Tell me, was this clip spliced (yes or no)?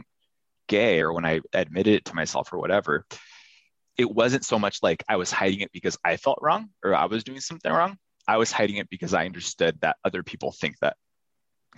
no